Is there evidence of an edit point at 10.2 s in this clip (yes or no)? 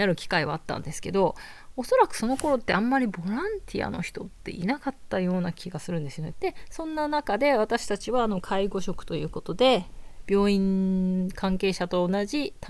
no